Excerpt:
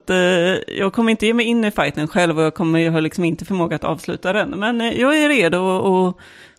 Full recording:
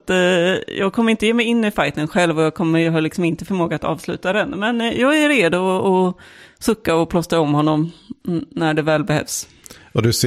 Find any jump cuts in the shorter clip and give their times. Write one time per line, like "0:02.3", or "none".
none